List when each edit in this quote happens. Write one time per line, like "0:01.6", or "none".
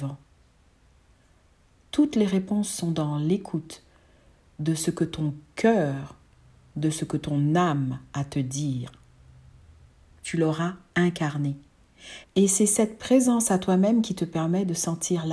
0:10.1
0:12.2